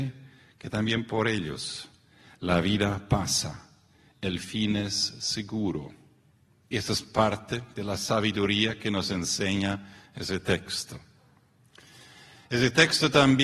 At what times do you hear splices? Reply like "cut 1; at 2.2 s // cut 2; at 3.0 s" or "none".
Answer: none